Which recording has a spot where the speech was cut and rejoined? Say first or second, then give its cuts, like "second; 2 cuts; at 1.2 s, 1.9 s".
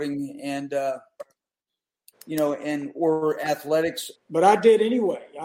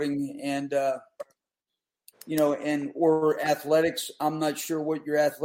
first; 1 cut; at 4.2 s